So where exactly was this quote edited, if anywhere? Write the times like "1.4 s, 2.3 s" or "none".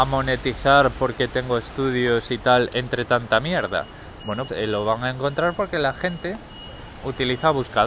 4.5 s